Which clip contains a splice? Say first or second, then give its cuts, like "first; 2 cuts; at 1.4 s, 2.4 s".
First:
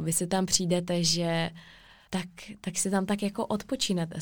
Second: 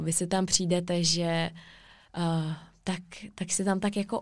first; 1 cut; at 2.1 s